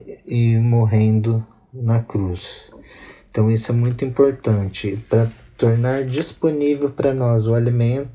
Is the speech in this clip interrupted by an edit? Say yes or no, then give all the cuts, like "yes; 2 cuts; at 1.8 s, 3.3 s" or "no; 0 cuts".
no; 0 cuts